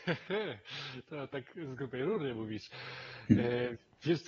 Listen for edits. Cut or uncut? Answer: uncut